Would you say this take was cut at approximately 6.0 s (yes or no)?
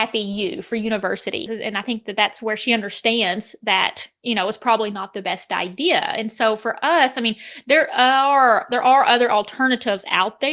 no